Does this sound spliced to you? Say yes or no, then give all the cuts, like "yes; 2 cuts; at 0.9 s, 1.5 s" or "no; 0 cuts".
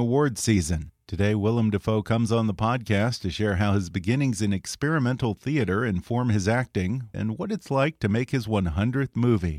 yes; 1 cut; at 7.1 s